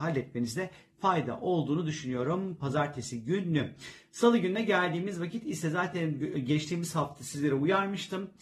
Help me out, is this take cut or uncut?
uncut